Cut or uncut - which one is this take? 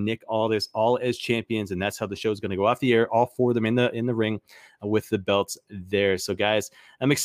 uncut